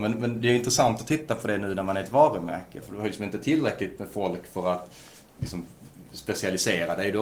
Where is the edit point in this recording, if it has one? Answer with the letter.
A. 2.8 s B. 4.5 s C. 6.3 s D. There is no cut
A